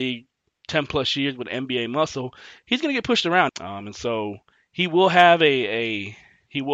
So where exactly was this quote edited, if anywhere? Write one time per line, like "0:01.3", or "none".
0:03.5